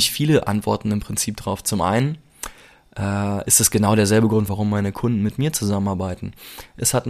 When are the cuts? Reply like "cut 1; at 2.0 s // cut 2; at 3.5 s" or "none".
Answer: cut 1; at 4.5 s